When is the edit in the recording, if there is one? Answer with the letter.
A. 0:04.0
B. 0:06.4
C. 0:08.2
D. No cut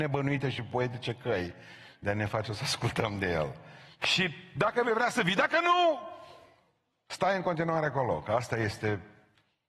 A